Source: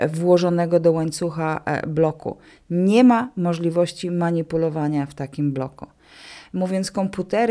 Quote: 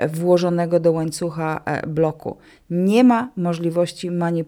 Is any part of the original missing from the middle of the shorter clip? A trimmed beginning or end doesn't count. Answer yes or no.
no